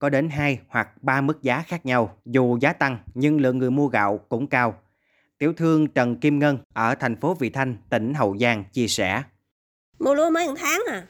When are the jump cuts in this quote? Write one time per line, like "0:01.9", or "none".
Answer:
0:02.2